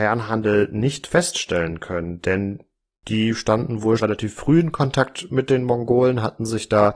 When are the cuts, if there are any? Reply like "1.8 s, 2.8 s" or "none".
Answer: 4.0 s